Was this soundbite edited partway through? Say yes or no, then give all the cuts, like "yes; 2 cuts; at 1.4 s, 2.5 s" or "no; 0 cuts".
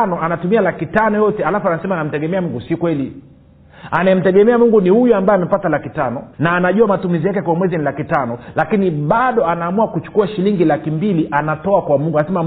yes; 1 cut; at 6.3 s